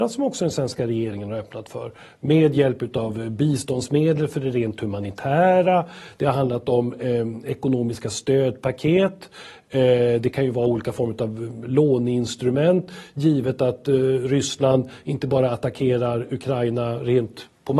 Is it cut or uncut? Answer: uncut